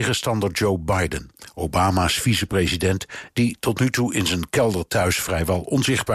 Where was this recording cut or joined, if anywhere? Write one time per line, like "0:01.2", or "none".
none